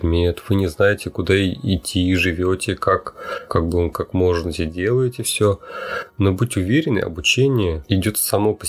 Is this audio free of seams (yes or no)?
yes